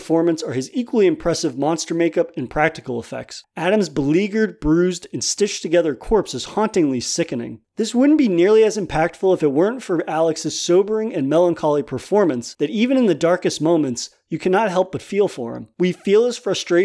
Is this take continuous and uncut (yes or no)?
no